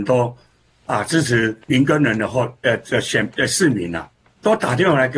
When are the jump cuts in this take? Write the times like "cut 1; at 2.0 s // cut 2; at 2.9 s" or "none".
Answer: cut 1; at 1.6 s